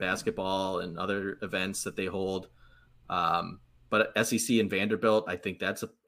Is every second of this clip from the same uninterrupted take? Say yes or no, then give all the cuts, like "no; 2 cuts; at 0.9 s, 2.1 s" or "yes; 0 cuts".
yes; 0 cuts